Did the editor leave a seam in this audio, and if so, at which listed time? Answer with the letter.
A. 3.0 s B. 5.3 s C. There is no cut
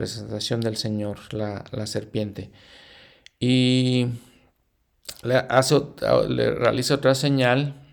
C